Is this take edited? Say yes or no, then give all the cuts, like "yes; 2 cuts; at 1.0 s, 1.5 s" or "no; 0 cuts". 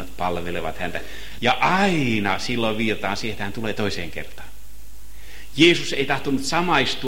yes; 1 cut; at 1.4 s